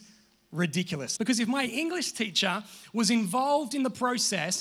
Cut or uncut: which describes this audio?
cut